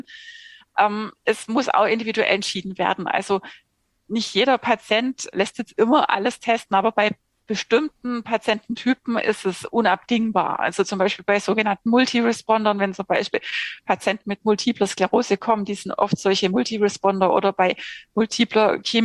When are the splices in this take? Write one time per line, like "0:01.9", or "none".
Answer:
0:01.2
0:05.3